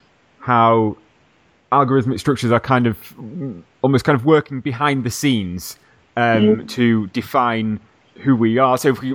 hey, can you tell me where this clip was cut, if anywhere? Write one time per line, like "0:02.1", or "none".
none